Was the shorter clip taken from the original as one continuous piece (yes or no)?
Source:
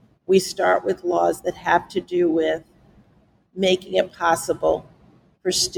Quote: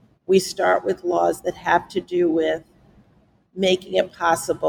yes